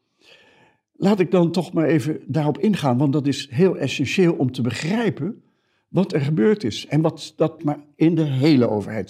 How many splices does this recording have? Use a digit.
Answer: 1